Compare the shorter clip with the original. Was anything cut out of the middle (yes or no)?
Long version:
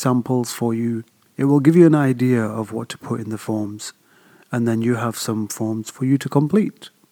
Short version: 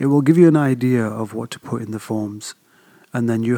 no